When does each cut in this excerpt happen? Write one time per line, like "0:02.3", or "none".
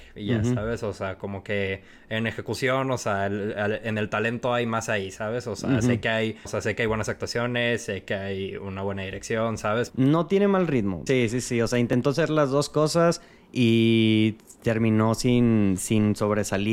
0:06.5
0:09.9
0:11.1